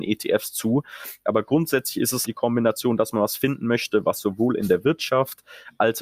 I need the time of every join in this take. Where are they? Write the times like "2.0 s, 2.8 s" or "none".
2.2 s